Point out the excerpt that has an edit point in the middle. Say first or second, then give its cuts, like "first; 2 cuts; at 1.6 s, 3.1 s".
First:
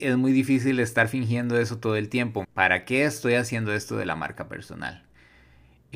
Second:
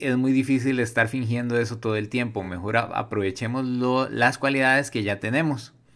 first; 1 cut; at 2.4 s